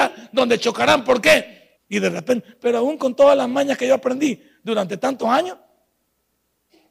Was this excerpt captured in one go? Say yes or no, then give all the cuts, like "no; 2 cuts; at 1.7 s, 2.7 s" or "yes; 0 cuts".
no; 1 cut; at 1.8 s